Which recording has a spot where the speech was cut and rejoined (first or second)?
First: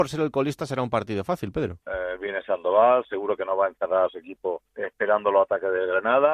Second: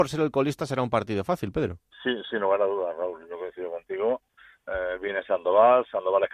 first